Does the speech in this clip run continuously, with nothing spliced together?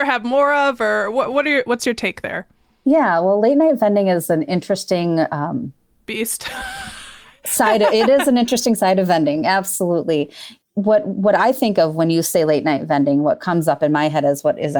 yes; 0 cuts

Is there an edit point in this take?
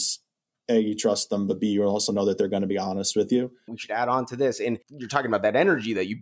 yes; 1 cut; at 3.7 s

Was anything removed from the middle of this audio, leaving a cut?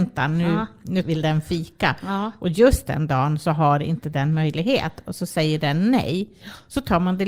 yes; 1 cut; at 1.0 s

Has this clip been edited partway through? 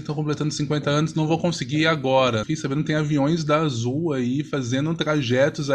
yes; 1 cut; at 2.4 s

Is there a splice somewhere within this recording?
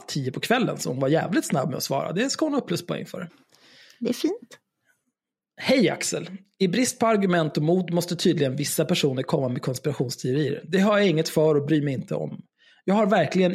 no; 0 cuts

